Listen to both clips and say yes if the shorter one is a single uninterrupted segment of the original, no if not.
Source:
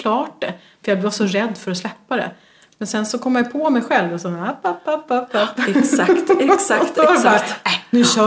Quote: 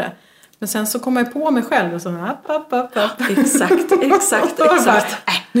no